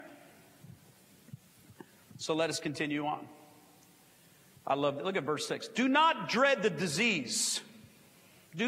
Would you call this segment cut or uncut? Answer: uncut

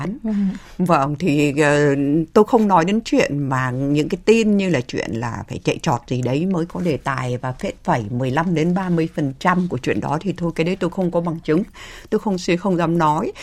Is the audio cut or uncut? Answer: uncut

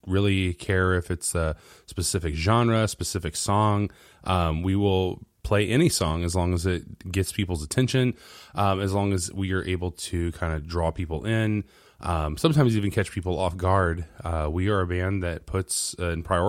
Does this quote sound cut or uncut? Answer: uncut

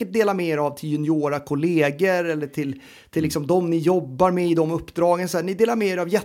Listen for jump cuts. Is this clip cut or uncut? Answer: uncut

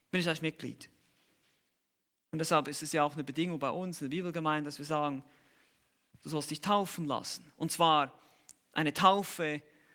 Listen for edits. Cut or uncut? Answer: uncut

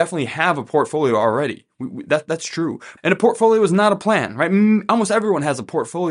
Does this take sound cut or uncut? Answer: cut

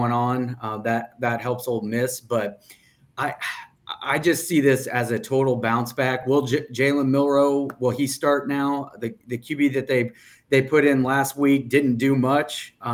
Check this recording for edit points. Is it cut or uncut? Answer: uncut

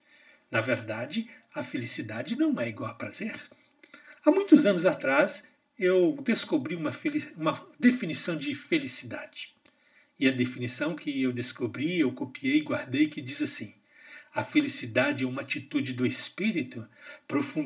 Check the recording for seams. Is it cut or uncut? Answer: uncut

